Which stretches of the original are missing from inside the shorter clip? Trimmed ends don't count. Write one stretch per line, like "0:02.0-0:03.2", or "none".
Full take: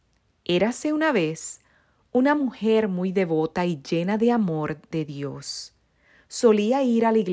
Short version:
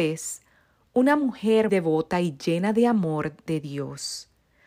0:02.9-0:03.1